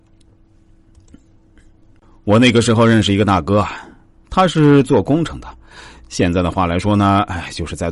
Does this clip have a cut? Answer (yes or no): no